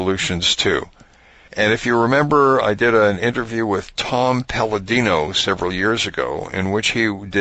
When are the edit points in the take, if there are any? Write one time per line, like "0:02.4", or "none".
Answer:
0:01.5
0:02.6